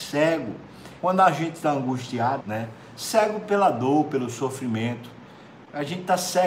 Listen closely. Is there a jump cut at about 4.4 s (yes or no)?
no